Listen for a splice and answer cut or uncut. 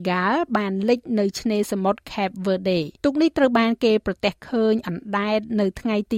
cut